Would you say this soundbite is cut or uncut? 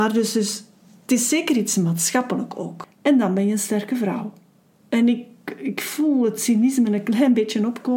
cut